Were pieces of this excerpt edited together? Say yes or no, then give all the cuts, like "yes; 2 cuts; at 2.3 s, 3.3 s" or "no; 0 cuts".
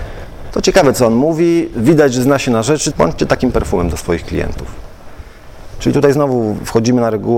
yes; 2 cuts; at 2.9 s, 5.7 s